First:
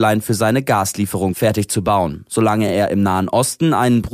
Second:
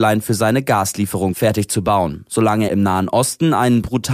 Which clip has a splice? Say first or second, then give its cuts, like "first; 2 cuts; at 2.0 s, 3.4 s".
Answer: second; 1 cut; at 2.7 s